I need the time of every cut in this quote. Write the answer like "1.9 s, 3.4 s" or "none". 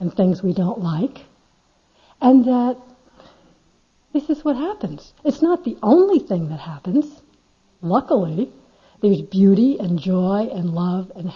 none